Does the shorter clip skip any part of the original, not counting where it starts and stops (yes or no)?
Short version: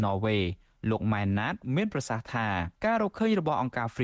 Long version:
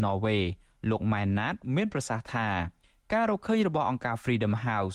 yes